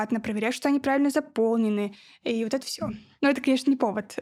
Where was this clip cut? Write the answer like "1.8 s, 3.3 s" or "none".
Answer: 2.6 s